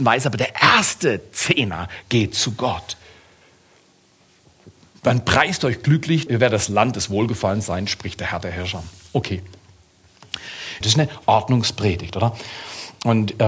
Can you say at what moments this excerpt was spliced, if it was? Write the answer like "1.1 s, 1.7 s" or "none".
6.3 s, 10.8 s